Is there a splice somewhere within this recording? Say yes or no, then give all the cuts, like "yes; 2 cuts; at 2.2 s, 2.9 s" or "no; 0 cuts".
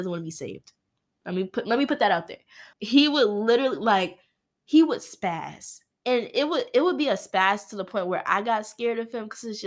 yes; 1 cut; at 2.7 s